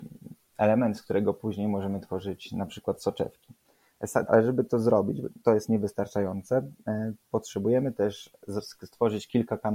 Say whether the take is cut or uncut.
cut